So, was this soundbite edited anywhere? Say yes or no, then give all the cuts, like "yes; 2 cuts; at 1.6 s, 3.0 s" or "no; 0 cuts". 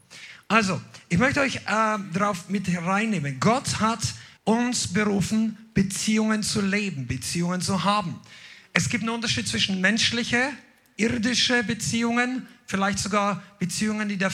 yes; 1 cut; at 4.4 s